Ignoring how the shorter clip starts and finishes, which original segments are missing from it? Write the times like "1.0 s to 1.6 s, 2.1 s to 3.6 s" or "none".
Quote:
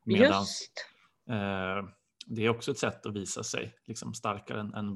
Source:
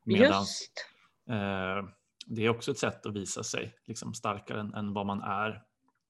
none

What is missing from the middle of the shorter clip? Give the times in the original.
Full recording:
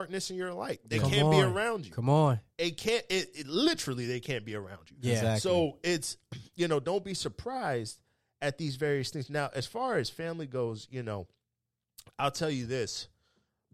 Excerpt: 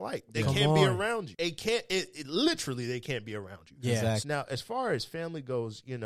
1.9 s to 2.5 s, 5.4 s to 9.3 s

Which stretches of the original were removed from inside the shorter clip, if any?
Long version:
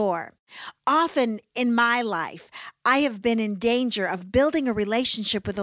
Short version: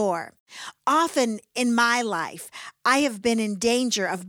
none

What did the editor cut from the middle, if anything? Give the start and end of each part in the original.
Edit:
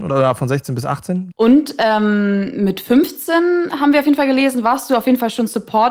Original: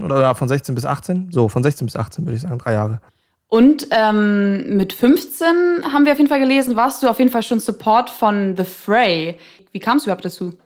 1.3 s to 3.4 s

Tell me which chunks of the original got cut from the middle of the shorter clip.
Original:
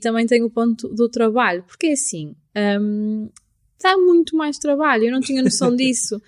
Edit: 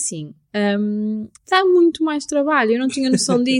3.4 s to 3.7 s

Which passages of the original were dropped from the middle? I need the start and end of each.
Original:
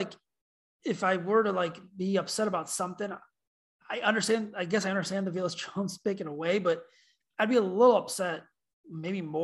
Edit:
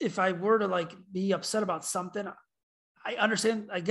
none

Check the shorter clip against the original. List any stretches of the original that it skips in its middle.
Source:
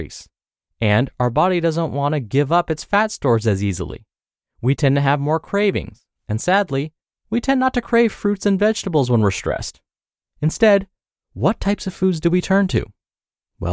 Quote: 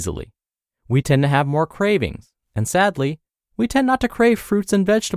none

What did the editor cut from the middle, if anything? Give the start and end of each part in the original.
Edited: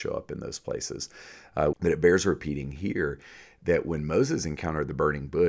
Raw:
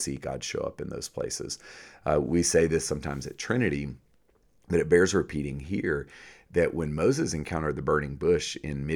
2.2 s to 4.6 s

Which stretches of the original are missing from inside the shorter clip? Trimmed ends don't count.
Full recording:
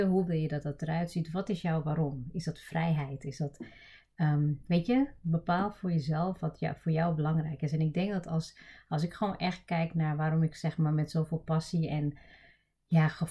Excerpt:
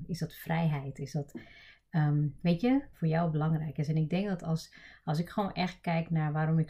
5.2 s to 6.8 s

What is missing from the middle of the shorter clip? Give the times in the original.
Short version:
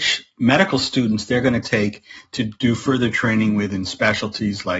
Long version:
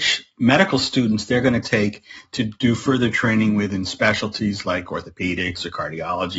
none

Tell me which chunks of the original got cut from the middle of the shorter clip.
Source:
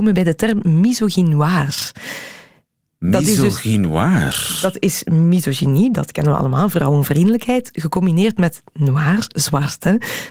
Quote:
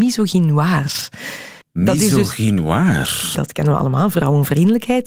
2.4 s to 2.9 s, 4.6 s to 5.9 s

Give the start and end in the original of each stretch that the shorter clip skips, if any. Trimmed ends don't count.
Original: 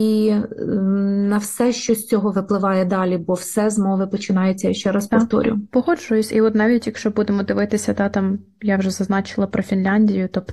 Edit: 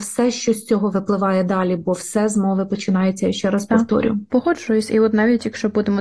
none

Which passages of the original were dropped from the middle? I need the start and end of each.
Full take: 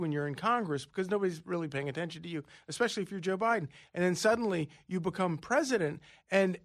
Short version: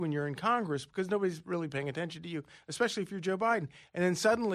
none

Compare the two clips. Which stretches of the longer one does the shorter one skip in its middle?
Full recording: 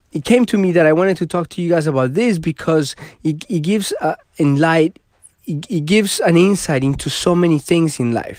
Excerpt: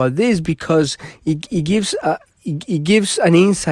4.2 s to 5.3 s

